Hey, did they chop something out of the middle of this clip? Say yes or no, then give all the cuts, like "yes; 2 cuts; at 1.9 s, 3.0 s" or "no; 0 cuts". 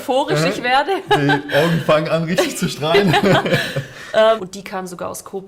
yes; 1 cut; at 4.4 s